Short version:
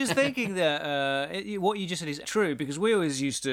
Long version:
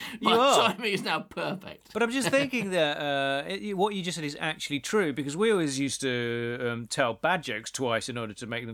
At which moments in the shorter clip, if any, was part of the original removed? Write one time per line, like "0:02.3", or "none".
0:02.2